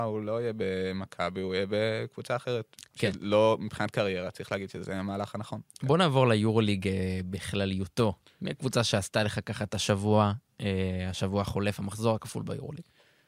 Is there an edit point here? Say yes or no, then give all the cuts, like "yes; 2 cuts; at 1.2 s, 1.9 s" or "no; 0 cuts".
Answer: no; 0 cuts